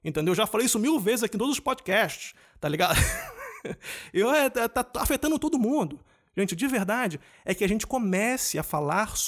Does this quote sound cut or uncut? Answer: uncut